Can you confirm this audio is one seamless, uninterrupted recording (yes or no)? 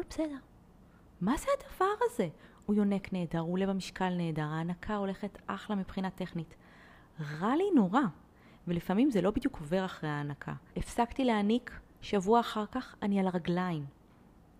no